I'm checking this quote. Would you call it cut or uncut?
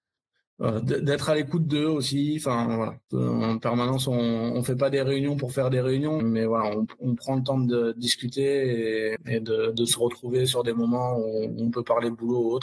cut